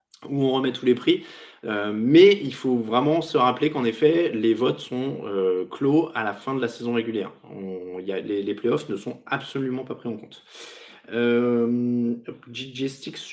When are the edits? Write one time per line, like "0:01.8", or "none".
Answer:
none